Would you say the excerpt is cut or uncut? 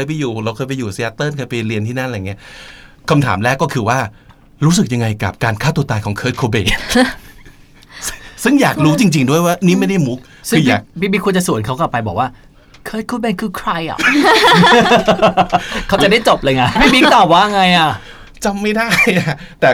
uncut